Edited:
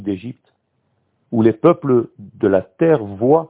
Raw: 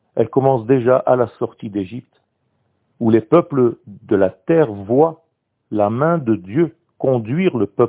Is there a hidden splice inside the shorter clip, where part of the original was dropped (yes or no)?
no